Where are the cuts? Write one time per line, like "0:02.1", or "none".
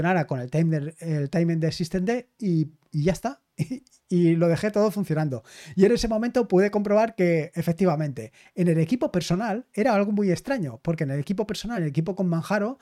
none